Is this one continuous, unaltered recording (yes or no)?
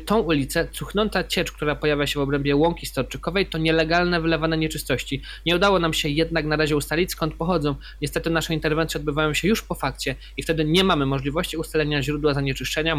yes